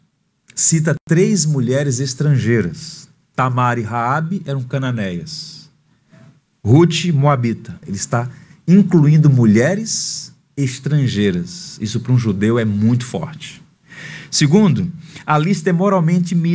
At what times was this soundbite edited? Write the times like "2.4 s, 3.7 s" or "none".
7.8 s